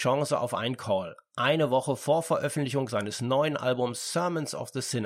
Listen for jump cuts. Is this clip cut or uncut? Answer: uncut